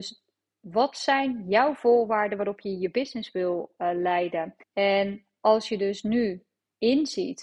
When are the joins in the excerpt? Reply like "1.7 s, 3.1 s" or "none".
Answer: 4.6 s